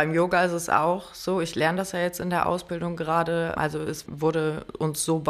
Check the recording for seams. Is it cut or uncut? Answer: uncut